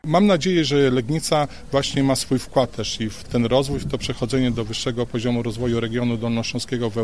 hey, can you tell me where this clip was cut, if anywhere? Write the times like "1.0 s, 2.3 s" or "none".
none